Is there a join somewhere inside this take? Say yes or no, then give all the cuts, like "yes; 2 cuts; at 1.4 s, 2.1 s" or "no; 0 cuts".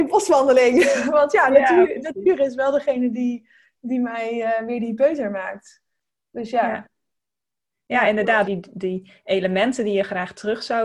yes; 1 cut; at 8.5 s